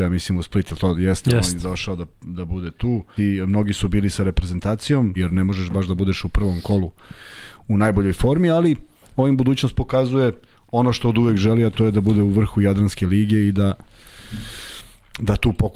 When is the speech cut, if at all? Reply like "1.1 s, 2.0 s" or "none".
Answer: 3.2 s, 5.2 s